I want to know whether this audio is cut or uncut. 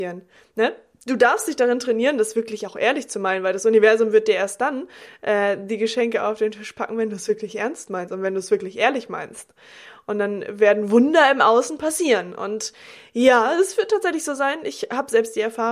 uncut